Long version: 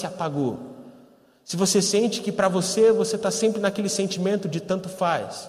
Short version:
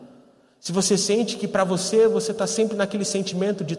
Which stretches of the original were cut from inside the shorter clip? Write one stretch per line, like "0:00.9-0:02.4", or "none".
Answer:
none